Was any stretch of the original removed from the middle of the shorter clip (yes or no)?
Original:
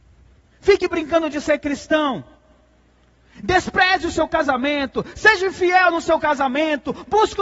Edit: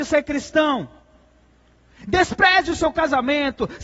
no